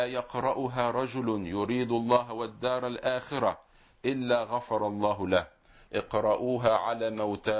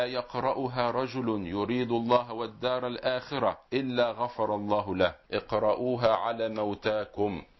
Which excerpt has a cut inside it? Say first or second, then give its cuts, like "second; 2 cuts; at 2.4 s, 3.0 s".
second; 2 cuts; at 3.7 s, 5.2 s